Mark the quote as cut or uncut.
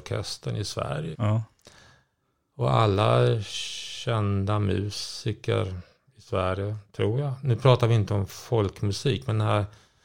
cut